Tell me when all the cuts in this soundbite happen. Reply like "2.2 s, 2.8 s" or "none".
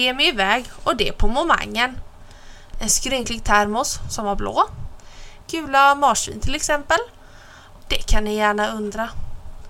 2.7 s, 5.4 s, 7.8 s